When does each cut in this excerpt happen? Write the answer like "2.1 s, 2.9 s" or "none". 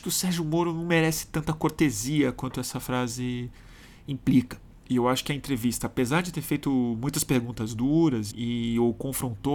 4.8 s, 8.3 s